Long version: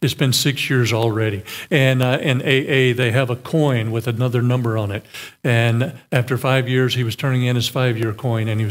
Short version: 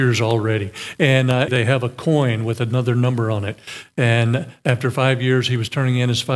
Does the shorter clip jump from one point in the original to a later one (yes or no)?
yes